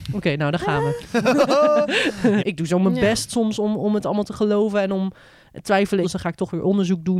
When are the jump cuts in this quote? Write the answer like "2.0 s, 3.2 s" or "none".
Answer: 2.4 s, 6.0 s

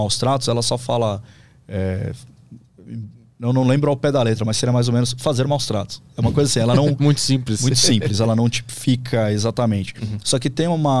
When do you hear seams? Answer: none

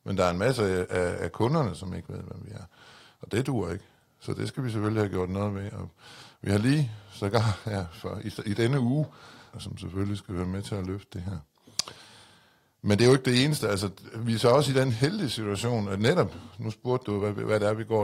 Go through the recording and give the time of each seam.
9.5 s

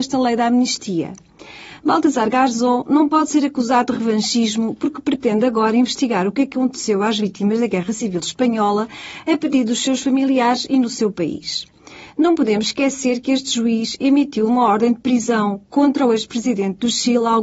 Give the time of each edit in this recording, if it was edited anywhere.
none

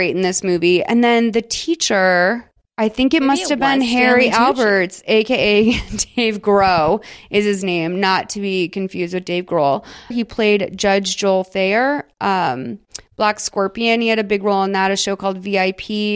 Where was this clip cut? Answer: 10.1 s

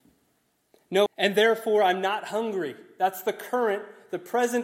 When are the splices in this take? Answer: 1.1 s

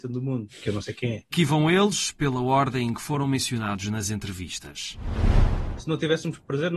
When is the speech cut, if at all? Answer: 1.3 s, 5.8 s

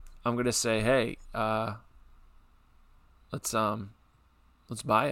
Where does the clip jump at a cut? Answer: none

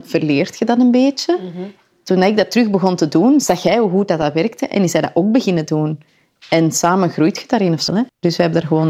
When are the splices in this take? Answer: 7.9 s

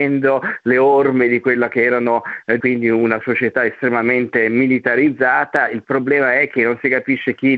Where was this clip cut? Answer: 2.6 s

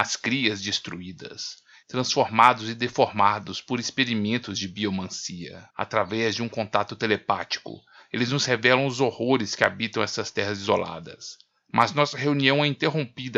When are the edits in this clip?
1.8 s, 5.7 s

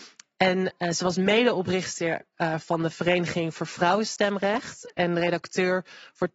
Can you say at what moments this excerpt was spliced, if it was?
none

